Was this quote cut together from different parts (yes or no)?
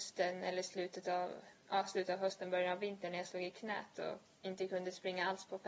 no